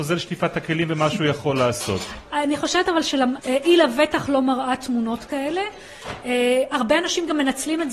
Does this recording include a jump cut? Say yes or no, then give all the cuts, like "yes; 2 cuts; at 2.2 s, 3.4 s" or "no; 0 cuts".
yes; 1 cut; at 3.4 s